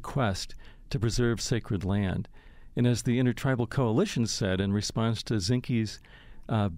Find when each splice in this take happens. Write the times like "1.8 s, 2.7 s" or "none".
none